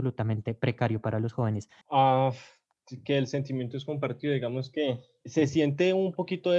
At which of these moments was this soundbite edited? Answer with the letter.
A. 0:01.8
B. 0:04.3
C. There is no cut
A